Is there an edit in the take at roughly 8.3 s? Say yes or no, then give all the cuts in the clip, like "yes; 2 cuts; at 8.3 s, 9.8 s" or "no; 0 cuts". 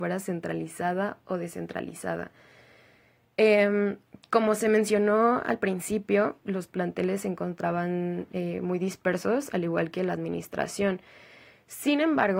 no; 1 cut; at 6.4 s